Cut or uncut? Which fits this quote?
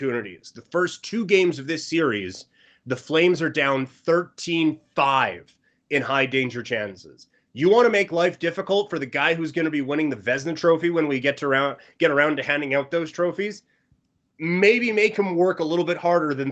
uncut